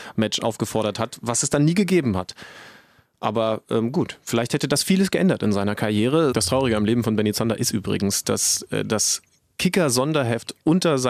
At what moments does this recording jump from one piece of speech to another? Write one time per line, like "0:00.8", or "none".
0:06.3